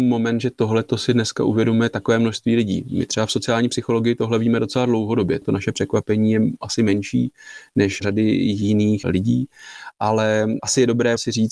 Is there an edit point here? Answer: no; 0 cuts

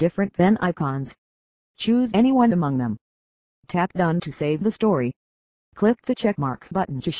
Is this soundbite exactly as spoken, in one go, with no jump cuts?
no; 1 cut; at 3.5 s

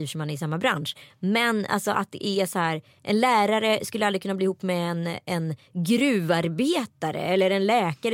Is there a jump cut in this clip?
no; 0 cuts

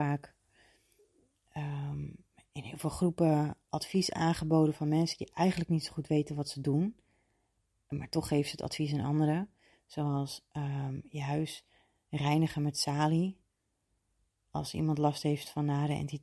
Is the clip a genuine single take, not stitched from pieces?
yes; 0 cuts

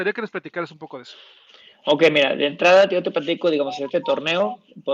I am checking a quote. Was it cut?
no; 0 cuts

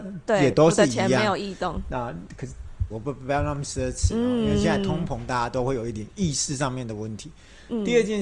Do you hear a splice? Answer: yes; 1 cut; at 2.9 s

